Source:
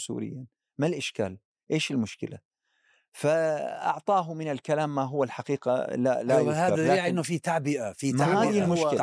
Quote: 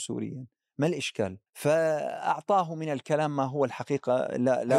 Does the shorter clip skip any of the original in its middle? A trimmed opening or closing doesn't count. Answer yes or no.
yes